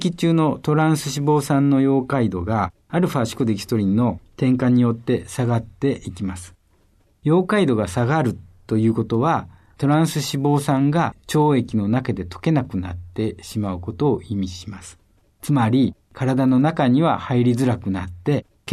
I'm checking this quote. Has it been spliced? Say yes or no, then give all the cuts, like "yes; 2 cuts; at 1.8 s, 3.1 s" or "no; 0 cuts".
no; 0 cuts